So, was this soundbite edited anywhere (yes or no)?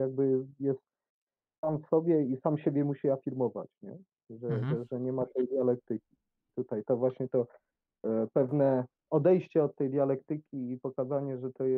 no